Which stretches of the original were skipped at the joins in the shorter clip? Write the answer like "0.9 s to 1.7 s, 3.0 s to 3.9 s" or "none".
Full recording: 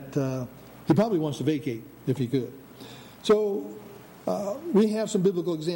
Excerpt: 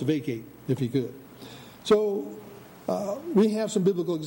none